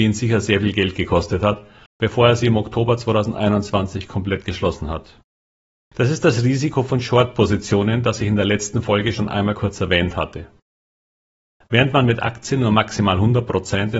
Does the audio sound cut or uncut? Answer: cut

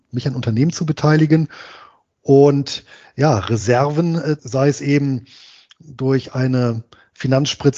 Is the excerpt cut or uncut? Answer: cut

